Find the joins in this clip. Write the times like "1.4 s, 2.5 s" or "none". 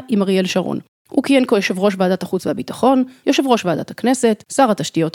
none